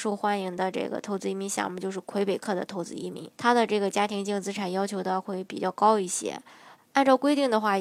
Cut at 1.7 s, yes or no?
no